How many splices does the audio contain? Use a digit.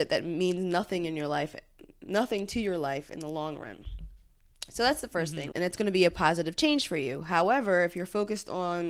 1